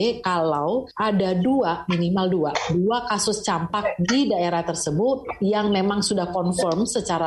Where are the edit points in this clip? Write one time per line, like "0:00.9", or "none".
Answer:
none